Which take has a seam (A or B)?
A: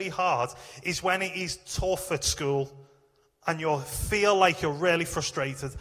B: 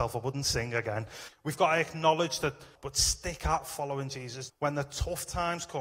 B